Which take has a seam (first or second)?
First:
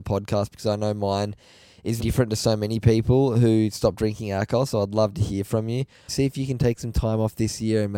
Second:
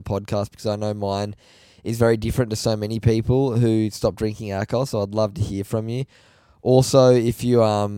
first